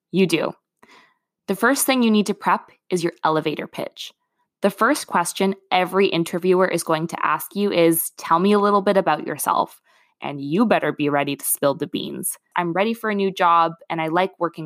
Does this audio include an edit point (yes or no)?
yes